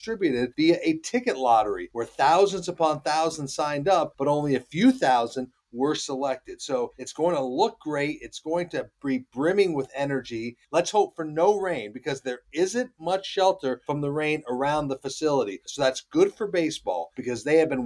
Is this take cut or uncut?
cut